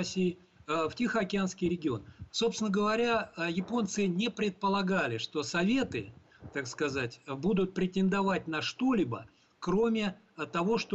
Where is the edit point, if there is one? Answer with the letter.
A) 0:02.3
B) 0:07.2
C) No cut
A